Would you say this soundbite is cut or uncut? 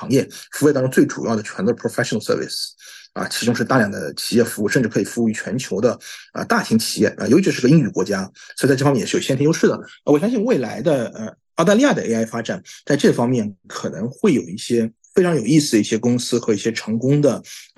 uncut